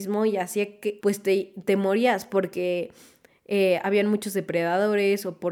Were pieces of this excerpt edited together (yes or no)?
yes